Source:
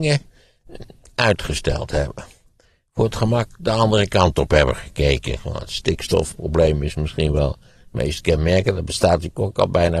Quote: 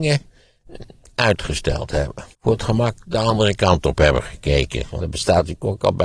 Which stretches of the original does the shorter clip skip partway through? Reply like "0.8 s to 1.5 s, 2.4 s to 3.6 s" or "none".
2.3 s to 2.9 s, 5.5 s to 8.8 s